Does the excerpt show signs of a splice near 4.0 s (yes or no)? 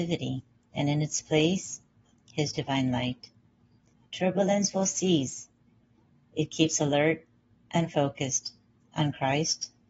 no